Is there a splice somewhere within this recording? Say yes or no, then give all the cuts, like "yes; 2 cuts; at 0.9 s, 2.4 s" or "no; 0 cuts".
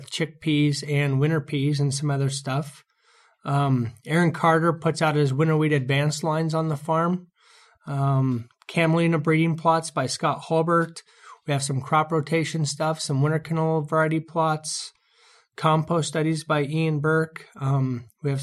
no; 0 cuts